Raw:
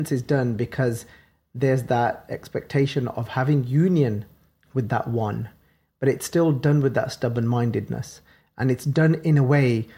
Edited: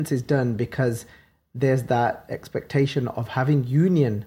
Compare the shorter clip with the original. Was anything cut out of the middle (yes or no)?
no